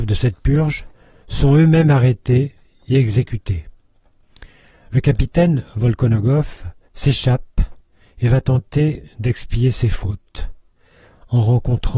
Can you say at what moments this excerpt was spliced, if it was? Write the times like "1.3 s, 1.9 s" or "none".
6.9 s